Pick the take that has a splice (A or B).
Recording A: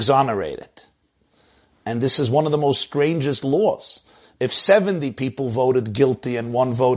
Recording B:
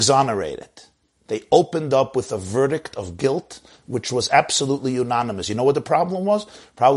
B